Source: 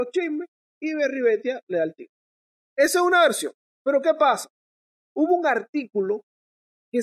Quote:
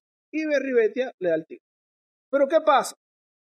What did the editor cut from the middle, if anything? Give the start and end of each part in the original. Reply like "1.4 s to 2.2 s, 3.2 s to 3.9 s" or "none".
2.7 s to 3.7 s

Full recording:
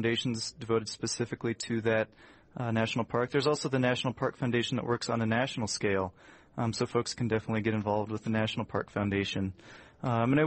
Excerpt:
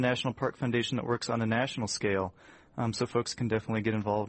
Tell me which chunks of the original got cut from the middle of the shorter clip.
none

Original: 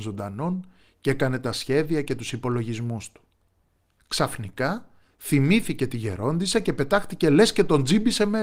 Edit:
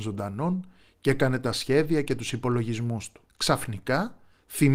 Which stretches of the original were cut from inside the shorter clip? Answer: 3.3 s to 4.0 s

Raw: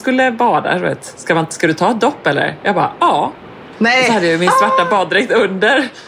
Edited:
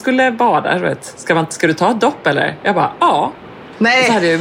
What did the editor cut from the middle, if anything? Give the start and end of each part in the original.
none

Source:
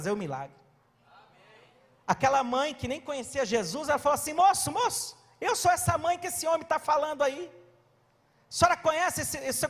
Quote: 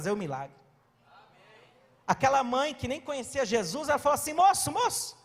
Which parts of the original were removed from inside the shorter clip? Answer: none

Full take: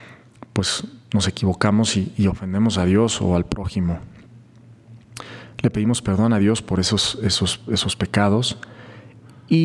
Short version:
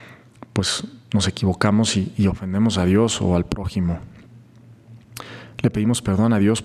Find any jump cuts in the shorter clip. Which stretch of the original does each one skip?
none

